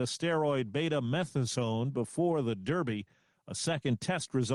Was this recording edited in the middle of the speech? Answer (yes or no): no